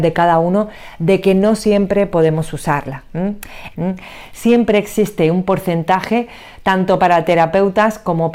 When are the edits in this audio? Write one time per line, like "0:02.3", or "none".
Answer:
0:03.7

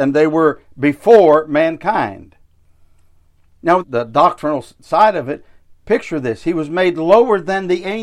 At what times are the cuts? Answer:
0:03.8

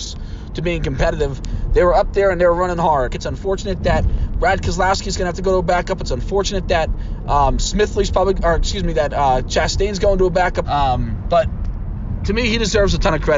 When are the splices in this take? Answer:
0:03.1
0:10.6

